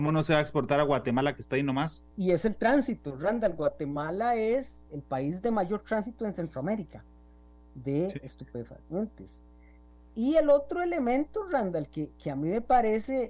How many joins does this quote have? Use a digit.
2